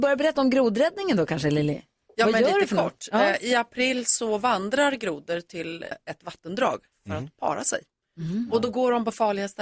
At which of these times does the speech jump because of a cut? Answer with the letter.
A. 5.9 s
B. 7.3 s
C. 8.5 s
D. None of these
A